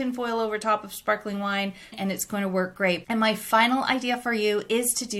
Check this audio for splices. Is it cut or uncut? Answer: cut